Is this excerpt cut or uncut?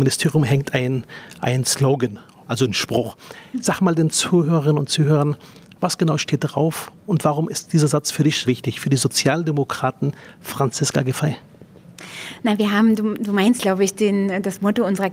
cut